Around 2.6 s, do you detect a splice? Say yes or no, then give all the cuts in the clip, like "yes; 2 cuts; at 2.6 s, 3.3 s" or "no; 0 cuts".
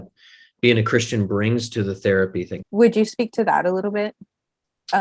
yes; 1 cut; at 2.6 s